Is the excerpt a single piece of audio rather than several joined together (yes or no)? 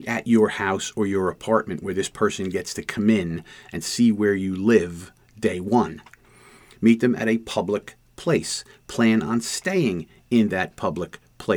yes